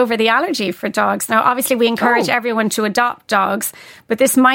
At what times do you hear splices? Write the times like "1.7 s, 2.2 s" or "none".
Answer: 1.3 s